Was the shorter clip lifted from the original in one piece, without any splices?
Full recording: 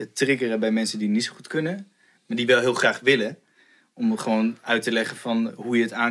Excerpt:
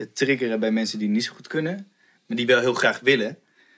yes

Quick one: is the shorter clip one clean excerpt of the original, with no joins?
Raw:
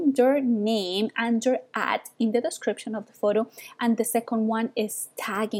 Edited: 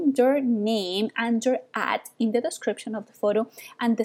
yes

